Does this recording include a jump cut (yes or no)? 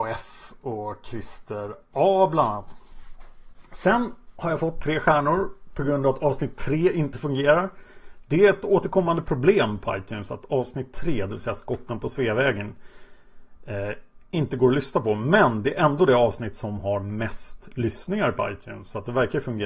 no